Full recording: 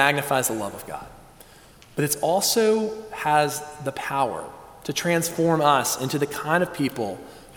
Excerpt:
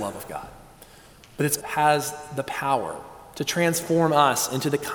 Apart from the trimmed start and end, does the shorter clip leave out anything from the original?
yes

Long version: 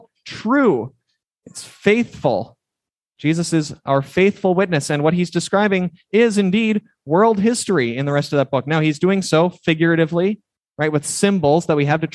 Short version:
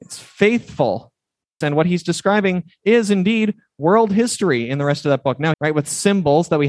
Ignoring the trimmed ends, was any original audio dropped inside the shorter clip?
yes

